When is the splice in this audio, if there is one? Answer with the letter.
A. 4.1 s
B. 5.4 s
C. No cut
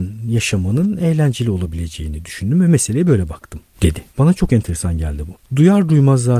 B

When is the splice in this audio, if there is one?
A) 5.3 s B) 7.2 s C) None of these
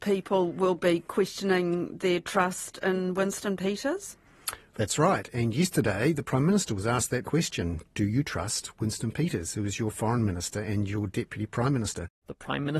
B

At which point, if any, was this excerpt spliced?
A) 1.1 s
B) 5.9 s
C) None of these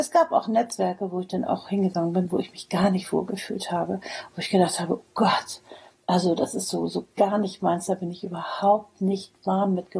C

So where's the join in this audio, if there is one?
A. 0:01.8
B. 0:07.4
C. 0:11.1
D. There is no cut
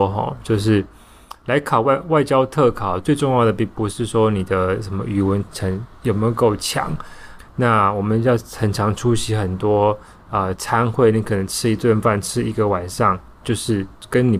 B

